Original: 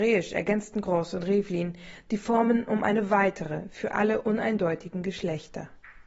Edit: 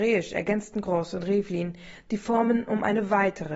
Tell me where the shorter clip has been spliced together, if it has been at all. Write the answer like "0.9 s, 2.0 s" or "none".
none